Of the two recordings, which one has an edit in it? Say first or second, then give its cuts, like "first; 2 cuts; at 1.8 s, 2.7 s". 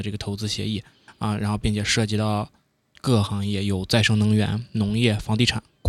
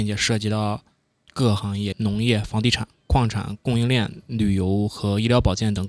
second; 1 cut; at 1.9 s